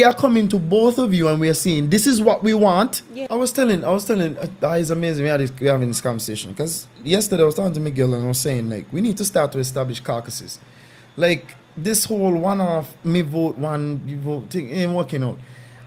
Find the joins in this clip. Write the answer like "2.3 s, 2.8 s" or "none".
3.3 s, 11.6 s